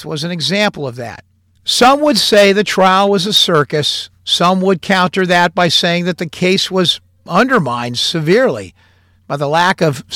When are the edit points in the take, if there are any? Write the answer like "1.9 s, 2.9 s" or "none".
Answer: 1.6 s